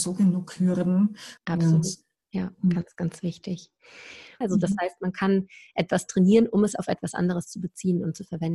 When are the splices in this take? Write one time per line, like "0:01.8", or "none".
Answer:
0:01.4
0:04.4